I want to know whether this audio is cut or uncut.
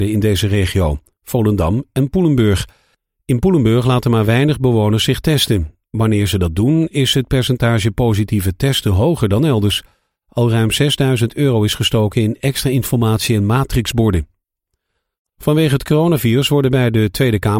uncut